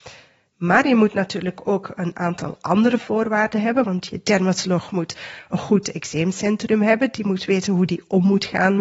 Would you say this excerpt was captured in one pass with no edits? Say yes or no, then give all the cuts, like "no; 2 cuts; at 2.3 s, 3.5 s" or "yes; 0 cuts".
no; 1 cut; at 3.8 s